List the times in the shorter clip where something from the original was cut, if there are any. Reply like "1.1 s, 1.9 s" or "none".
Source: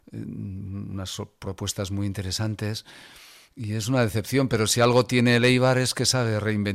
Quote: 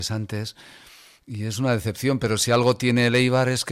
none